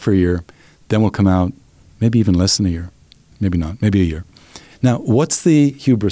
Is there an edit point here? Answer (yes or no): yes